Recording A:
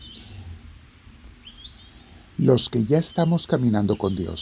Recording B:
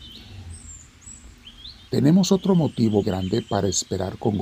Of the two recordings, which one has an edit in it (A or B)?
B